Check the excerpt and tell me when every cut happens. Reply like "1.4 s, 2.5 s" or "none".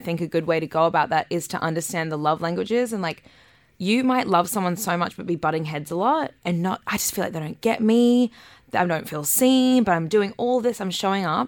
none

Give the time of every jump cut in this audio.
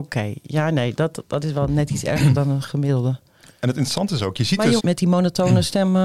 4.8 s

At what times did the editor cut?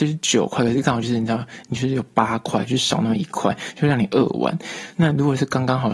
none

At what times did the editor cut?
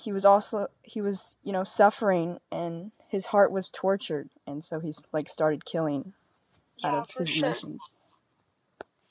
4.3 s

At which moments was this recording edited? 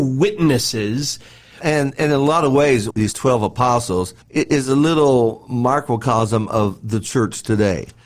1.6 s, 2.9 s, 4.2 s

